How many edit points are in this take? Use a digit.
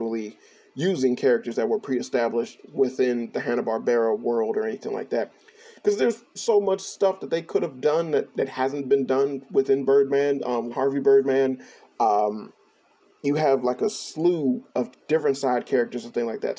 2